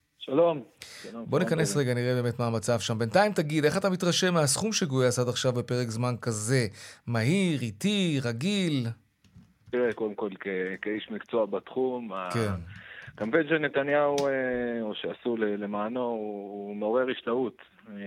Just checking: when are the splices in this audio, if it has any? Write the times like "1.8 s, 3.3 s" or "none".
9.9 s